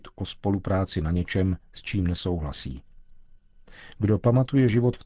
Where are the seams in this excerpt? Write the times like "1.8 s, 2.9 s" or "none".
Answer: none